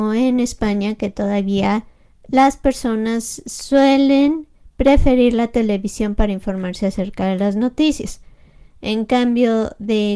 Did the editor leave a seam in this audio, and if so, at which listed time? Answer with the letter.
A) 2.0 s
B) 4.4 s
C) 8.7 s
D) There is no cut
D